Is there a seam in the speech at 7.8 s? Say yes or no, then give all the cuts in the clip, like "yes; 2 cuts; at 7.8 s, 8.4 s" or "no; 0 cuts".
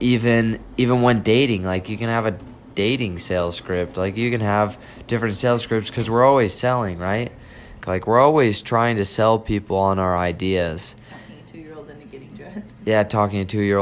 yes; 1 cut; at 7.8 s